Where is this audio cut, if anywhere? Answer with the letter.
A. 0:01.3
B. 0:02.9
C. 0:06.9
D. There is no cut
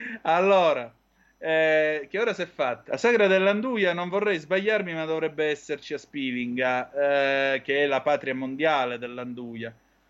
B